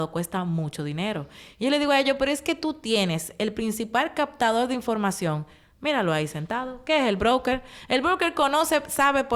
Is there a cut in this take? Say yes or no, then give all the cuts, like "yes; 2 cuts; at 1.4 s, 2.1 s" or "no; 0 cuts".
no; 0 cuts